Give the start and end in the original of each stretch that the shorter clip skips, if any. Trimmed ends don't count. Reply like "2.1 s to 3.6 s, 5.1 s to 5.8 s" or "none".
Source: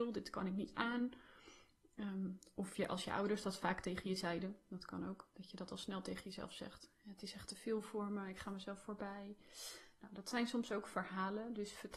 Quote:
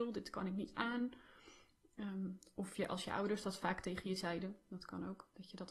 none